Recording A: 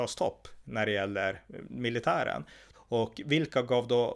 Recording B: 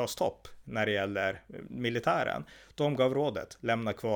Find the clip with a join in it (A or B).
A